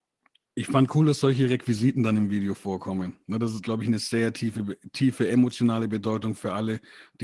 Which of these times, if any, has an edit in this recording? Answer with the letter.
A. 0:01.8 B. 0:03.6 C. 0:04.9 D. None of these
B